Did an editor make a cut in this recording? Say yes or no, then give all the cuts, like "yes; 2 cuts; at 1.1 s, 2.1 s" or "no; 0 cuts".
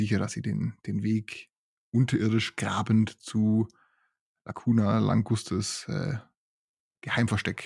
no; 0 cuts